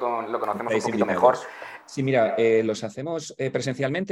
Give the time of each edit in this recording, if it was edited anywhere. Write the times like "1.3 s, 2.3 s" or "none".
1.8 s